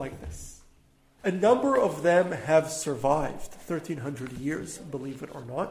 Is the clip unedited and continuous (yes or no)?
no